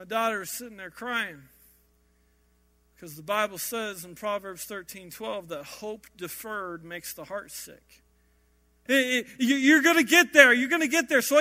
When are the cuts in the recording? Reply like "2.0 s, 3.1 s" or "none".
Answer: 8.9 s